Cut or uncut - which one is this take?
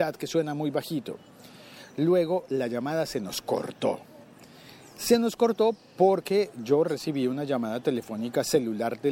uncut